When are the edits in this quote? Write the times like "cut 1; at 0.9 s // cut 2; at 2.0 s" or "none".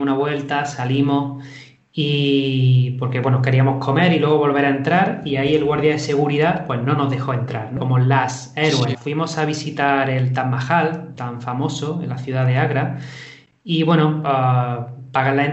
cut 1; at 7.8 s // cut 2; at 8.9 s